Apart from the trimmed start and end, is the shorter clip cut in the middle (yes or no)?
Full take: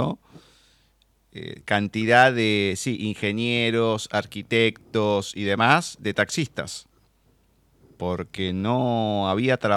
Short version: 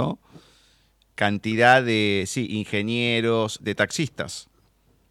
yes